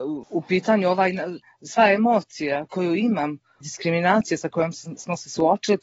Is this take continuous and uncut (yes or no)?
no